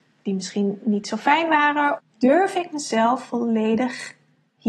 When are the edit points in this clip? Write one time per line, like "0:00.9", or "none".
0:02.0